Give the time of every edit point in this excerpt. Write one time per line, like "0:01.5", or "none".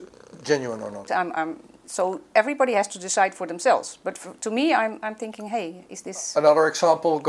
0:01.1